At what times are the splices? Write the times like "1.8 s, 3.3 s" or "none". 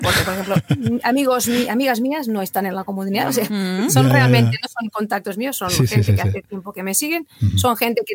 none